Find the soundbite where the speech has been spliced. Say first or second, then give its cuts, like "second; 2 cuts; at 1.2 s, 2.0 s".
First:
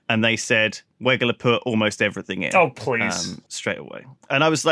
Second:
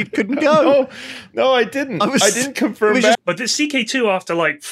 second; 1 cut; at 3.1 s